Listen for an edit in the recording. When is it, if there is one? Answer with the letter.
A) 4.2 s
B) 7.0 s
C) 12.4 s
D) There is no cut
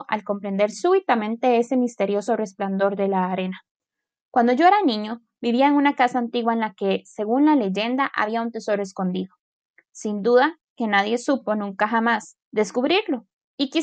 C